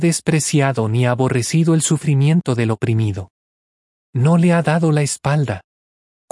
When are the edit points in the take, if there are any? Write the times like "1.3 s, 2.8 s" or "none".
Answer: none